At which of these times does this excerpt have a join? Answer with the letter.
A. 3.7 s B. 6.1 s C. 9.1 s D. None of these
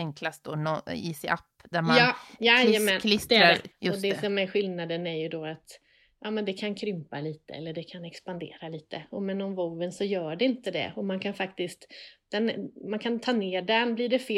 A